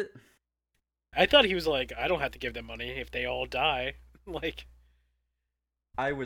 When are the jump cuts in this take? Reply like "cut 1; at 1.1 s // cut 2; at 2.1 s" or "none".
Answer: cut 1; at 1.1 s